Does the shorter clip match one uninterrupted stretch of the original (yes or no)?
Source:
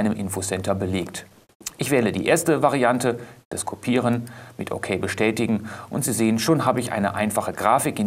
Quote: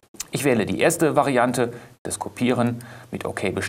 yes